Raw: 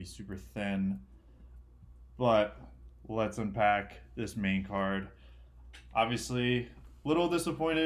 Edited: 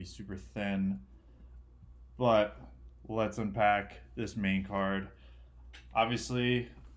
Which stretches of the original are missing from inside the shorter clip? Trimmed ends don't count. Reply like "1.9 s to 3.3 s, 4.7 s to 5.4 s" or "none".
none